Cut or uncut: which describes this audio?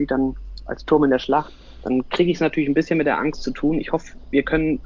uncut